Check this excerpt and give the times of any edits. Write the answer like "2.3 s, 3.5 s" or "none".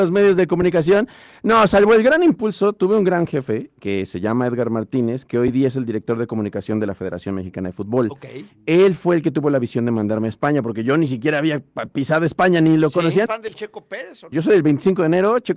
13.3 s, 14.3 s